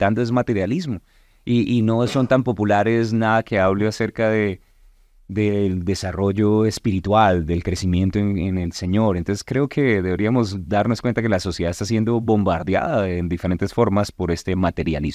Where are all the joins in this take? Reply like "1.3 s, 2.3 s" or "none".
none